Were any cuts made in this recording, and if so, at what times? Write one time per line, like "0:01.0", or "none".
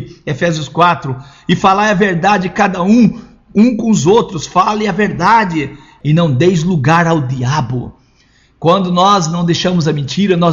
none